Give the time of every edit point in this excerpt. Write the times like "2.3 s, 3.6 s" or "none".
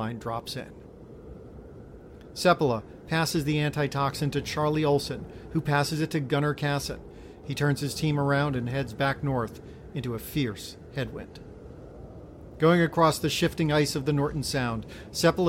7.4 s